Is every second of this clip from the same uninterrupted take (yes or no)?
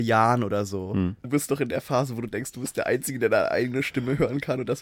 no